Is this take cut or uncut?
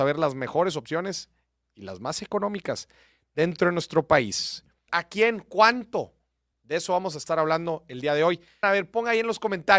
cut